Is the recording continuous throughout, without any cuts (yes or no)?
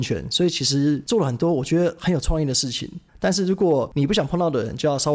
no